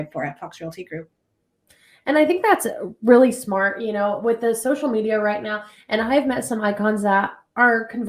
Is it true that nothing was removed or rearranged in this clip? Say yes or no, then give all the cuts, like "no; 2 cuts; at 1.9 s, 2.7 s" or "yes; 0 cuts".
yes; 0 cuts